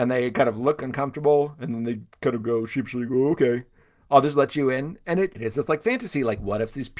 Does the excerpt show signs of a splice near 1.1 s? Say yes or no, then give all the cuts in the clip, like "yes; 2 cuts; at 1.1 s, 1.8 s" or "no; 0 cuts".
no; 2 cuts; at 3.1 s, 5.3 s